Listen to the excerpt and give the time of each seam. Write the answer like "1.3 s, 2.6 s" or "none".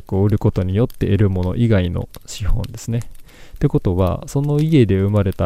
none